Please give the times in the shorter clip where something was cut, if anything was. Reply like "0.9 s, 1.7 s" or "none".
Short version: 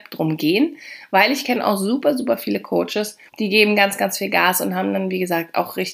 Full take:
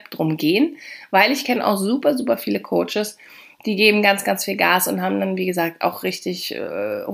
3.3 s